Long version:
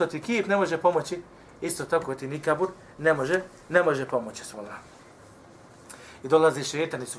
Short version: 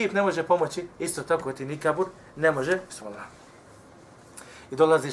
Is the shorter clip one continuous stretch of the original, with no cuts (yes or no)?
no